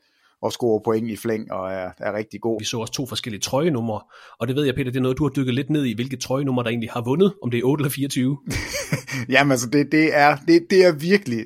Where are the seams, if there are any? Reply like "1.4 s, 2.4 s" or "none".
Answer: 2.6 s